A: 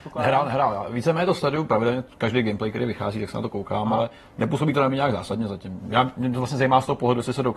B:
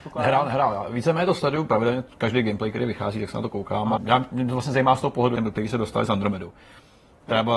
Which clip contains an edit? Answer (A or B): B